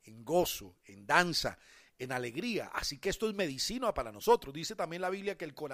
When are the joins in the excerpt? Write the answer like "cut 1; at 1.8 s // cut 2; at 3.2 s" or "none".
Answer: none